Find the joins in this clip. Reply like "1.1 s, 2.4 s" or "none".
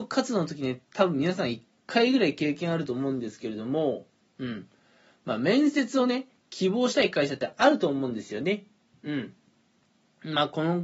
none